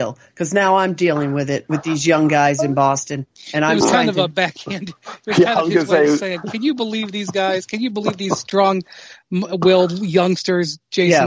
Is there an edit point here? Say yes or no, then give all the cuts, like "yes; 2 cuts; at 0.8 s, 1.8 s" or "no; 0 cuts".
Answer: no; 0 cuts